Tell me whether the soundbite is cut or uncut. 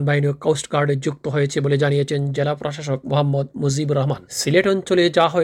cut